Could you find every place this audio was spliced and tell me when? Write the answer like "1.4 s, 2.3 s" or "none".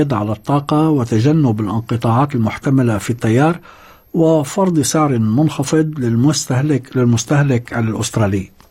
none